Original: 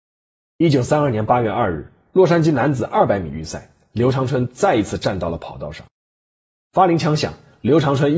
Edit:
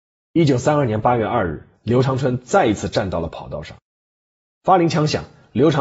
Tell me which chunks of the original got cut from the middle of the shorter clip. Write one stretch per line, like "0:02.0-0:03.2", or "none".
0:02.0-0:03.8